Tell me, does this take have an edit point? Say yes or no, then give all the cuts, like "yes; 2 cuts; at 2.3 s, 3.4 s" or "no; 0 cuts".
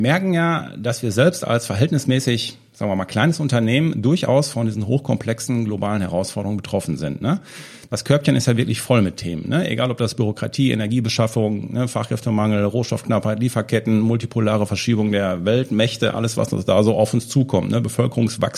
no; 0 cuts